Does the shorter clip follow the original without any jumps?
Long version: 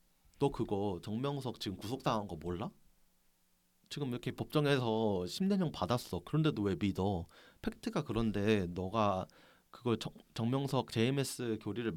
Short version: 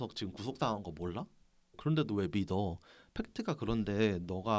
no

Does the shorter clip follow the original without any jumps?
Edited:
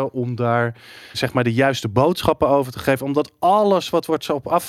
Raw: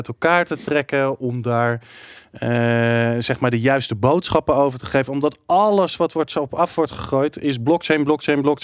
no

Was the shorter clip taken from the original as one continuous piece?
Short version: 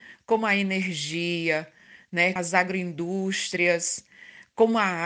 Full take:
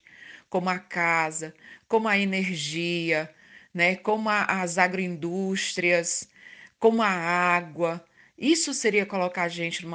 no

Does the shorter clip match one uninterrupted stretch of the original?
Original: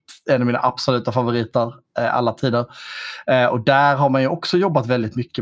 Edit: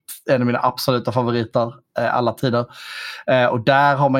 yes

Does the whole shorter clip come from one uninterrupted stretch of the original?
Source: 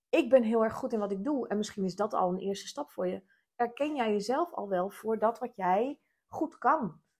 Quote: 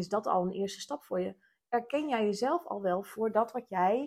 yes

